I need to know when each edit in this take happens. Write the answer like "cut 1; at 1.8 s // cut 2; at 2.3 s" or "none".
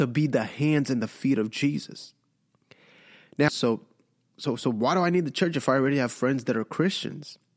cut 1; at 3.5 s